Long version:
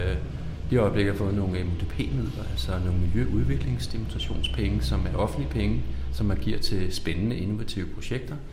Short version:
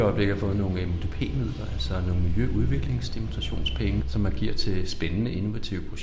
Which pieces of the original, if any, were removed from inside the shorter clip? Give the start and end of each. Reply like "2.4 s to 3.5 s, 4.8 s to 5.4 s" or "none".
4.8 s to 6.1 s

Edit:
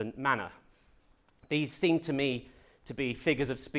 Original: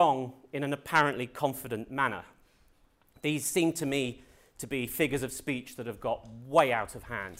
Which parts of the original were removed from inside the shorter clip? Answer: none

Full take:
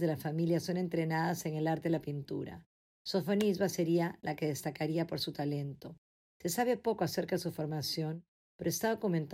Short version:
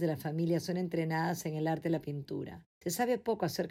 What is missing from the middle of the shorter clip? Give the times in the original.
2.7 s to 6.3 s

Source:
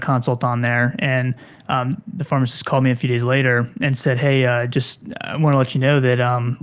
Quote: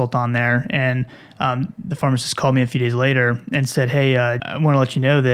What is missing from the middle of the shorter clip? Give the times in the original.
4.7 s to 5.2 s

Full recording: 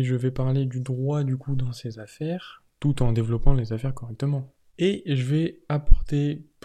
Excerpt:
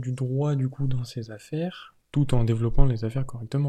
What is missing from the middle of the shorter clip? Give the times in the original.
none

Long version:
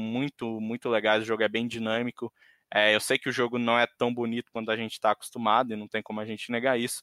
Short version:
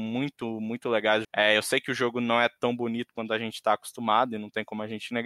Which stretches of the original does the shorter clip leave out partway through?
1.2 s to 2.6 s

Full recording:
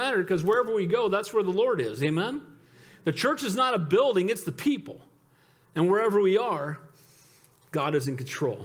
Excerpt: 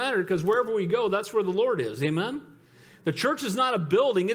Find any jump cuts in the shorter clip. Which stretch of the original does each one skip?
none

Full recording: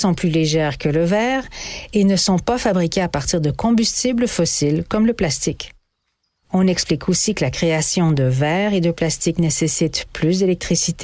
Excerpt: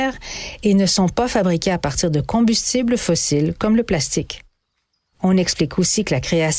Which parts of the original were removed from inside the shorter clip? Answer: none

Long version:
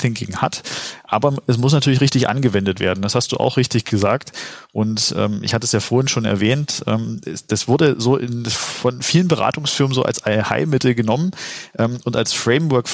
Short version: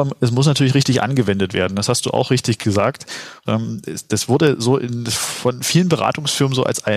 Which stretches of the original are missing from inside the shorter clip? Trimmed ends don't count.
4.7 s to 6.8 s

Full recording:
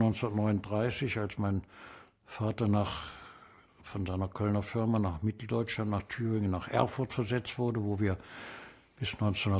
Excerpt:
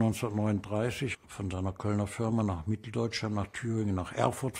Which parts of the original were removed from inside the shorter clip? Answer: 1.1 s to 3.7 s

